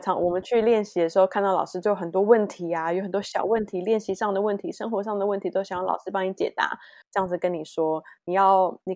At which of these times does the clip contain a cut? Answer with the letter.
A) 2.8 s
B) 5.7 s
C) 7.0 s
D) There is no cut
C